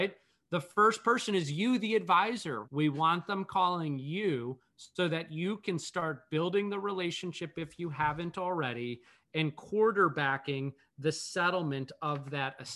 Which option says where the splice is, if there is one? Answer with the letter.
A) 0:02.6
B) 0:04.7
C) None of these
A